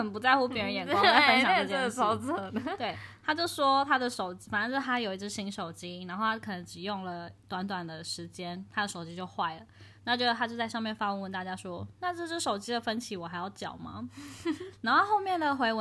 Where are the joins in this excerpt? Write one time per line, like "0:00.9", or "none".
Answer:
none